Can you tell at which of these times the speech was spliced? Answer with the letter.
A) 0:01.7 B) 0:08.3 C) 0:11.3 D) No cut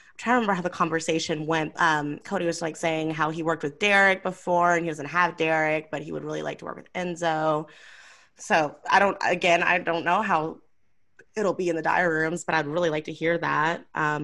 A